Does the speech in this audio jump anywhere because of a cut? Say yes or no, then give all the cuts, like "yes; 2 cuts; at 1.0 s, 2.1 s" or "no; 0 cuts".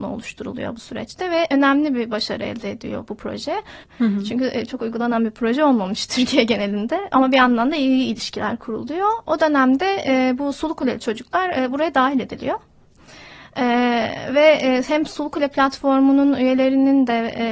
yes; 3 cuts; at 3.8 s, 7.1 s, 9.2 s